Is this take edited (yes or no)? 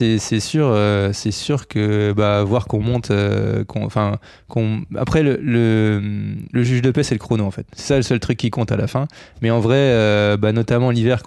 no